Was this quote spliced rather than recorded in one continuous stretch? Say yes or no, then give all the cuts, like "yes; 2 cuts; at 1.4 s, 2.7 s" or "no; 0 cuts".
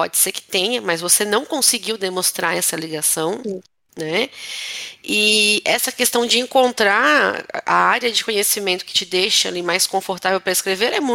no; 0 cuts